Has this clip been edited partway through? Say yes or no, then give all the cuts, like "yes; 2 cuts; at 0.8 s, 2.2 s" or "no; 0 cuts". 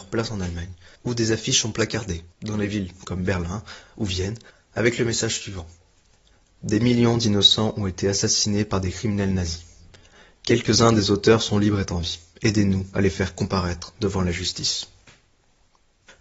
no; 0 cuts